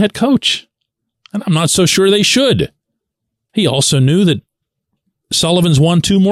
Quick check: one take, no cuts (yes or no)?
no